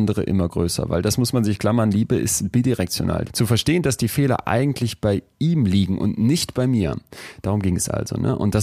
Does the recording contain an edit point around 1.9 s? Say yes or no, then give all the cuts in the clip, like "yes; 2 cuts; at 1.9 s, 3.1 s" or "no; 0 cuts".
no; 1 cut; at 3.3 s